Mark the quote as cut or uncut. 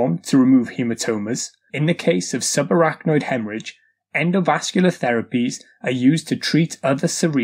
cut